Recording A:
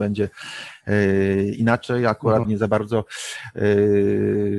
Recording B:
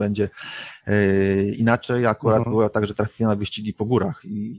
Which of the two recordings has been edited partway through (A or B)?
A